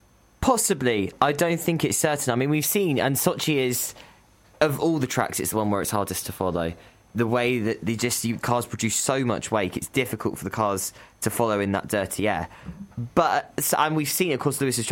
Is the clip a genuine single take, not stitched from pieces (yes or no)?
yes